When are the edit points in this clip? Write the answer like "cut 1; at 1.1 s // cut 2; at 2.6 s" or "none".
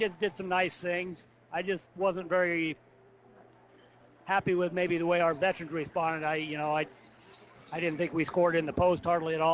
none